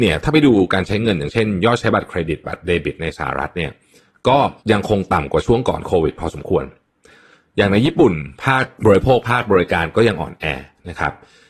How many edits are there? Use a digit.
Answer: 1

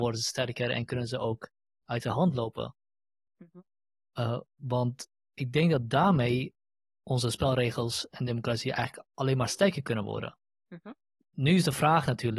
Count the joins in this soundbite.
1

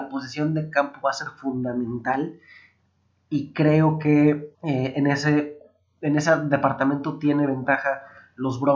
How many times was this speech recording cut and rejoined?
1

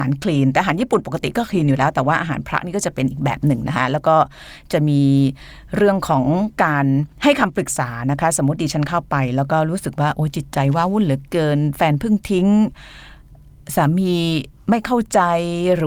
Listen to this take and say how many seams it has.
1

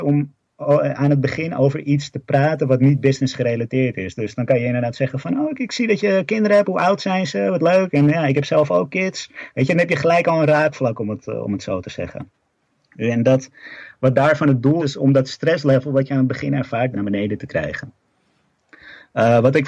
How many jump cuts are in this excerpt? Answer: 2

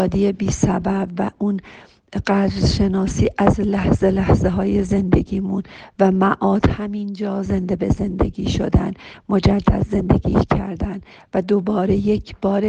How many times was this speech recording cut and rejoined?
0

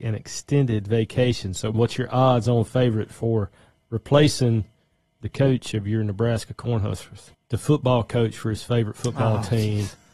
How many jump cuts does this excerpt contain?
2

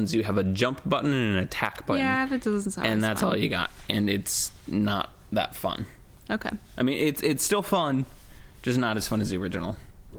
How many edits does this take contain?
0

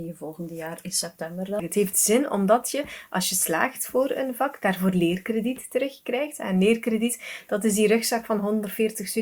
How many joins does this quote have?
1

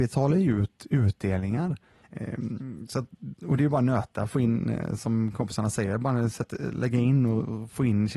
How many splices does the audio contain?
1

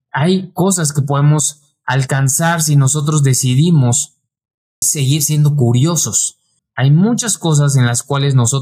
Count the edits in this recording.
2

